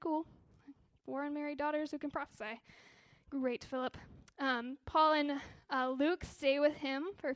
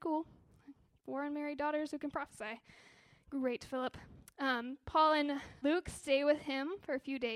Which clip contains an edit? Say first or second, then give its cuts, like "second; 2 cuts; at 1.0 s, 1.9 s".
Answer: second; 1 cut; at 5.6 s